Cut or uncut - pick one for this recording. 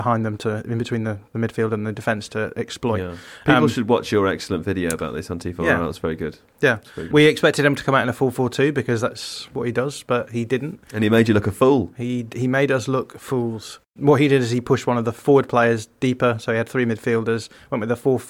cut